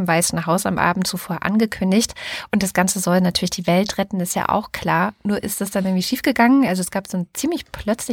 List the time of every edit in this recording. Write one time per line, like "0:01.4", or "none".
none